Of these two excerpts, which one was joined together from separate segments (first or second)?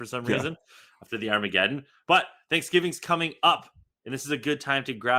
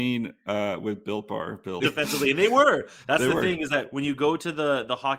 second